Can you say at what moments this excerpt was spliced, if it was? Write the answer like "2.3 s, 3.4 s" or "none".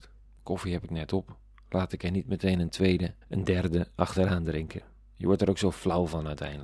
3.2 s